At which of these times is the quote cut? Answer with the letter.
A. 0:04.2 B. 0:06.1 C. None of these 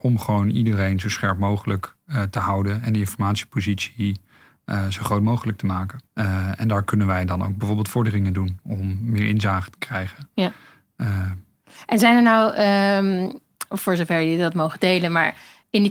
B